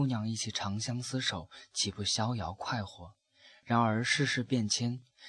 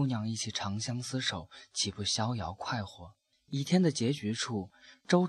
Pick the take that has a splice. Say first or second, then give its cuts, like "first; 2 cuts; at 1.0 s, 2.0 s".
second; 1 cut; at 3.3 s